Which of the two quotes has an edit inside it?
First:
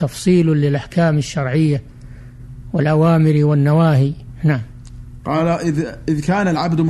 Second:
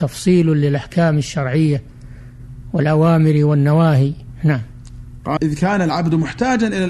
second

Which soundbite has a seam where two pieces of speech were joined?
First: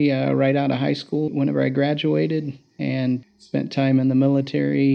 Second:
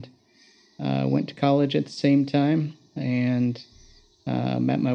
first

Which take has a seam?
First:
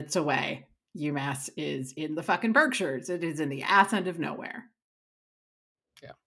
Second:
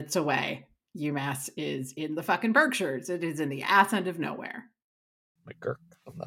second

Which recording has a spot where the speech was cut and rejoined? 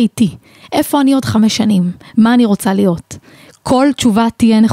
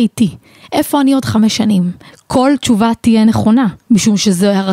second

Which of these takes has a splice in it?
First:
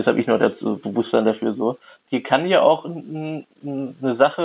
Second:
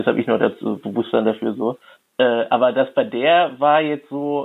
first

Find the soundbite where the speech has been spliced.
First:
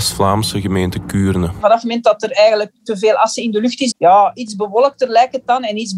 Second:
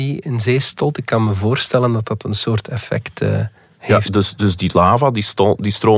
first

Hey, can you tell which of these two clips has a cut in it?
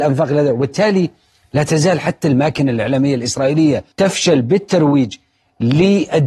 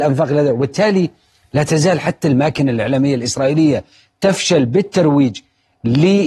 first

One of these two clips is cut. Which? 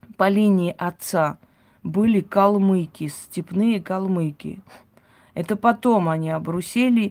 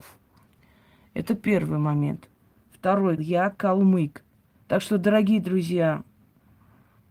second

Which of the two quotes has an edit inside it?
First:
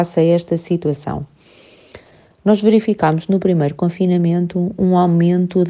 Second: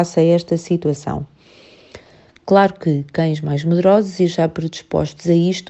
second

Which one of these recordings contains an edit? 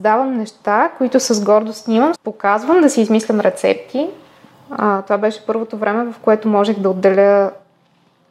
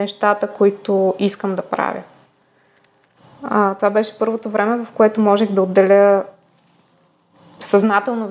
first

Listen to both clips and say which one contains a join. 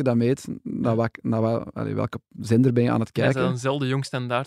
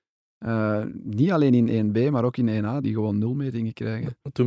second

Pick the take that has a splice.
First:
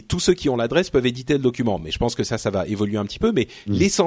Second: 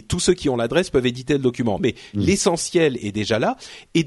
second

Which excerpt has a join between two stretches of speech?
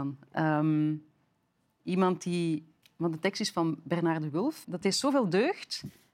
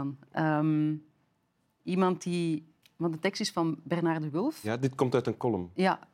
first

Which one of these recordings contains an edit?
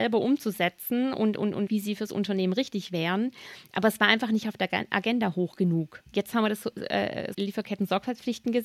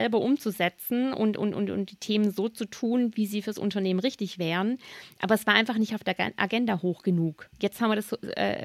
first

